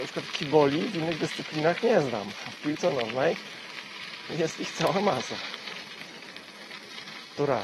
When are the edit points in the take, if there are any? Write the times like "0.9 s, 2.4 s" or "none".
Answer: none